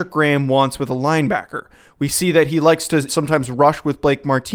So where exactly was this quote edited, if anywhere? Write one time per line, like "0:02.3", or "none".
0:03.1